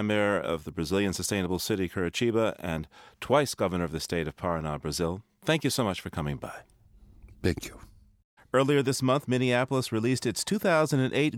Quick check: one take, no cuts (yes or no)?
no